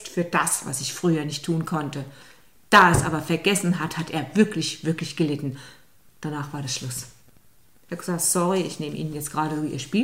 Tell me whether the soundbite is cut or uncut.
uncut